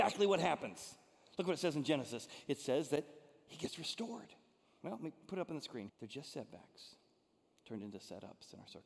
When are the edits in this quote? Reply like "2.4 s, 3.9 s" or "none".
4.8 s, 5.9 s